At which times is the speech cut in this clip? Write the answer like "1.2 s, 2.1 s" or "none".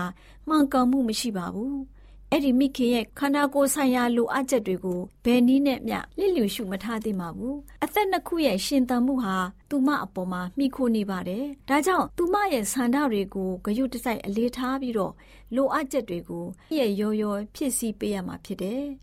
16.7 s